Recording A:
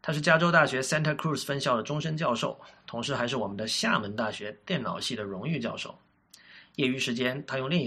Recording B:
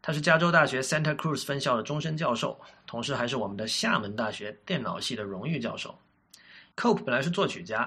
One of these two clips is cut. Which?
B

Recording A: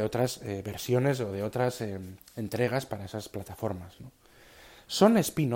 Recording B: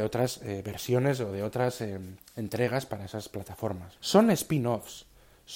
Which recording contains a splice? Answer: B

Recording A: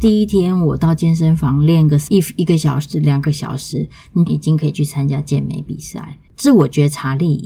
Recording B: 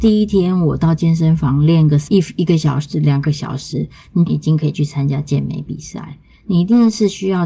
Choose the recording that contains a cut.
A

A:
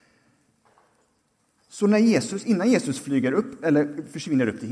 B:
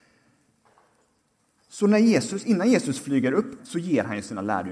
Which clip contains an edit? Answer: B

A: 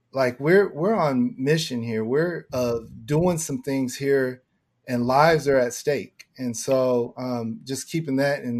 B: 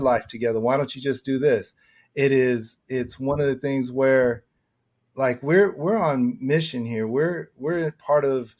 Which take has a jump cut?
A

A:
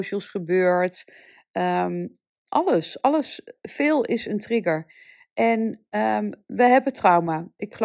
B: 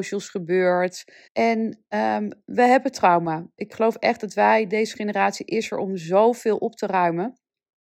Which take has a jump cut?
B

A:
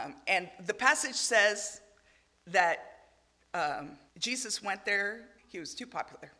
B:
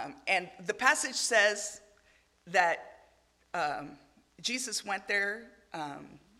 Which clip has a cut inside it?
A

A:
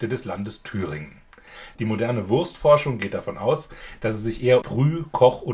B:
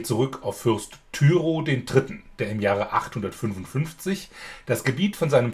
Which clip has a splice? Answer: A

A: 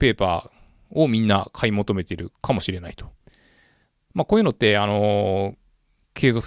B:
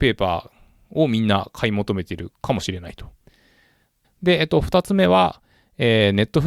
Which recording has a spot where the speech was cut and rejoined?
B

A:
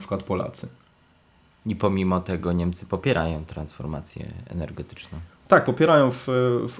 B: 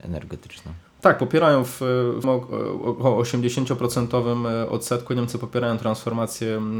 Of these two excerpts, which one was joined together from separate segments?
B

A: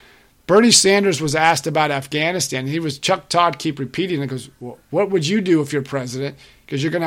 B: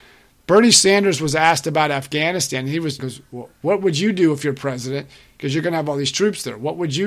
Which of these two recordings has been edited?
B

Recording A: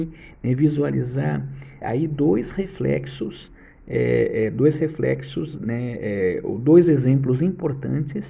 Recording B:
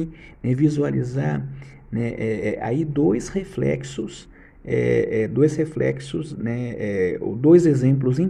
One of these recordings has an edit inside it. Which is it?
A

